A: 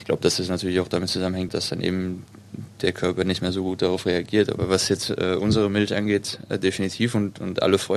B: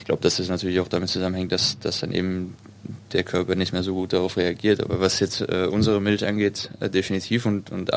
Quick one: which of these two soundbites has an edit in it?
A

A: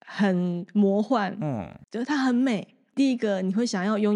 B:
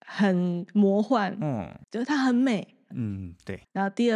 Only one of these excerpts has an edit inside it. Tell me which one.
B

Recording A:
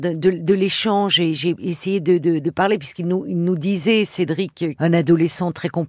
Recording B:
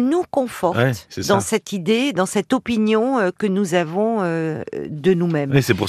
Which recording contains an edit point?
A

